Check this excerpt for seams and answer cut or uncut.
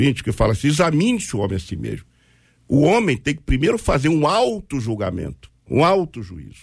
cut